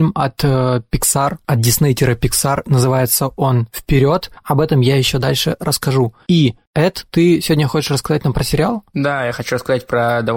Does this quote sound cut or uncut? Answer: uncut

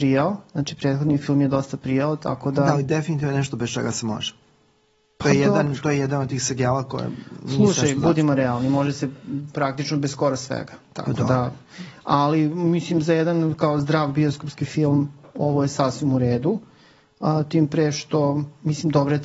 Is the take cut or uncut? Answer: uncut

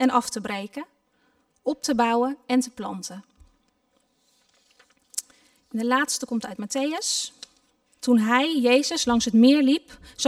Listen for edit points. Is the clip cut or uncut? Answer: cut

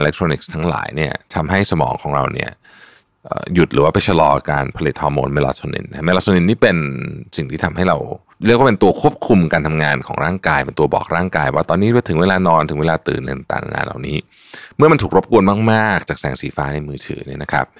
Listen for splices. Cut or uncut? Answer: cut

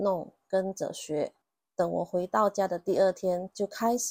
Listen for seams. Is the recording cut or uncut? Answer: cut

